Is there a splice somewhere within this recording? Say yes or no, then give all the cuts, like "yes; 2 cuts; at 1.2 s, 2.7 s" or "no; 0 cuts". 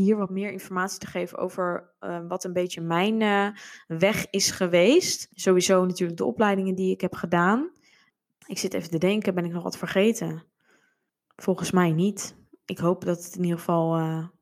no; 0 cuts